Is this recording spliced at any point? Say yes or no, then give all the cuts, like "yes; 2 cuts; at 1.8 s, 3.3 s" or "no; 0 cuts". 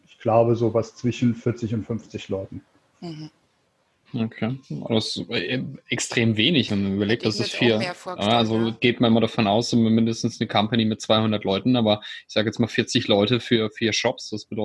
yes; 1 cut; at 6.7 s